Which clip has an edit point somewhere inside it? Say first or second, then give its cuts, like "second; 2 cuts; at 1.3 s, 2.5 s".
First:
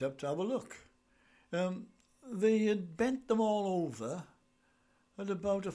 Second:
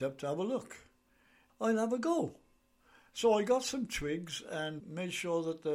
second; 2 cuts; at 1.5 s, 4.8 s